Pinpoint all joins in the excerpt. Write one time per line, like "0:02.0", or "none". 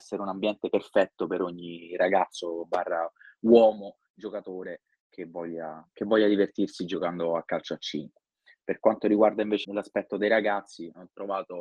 0:09.6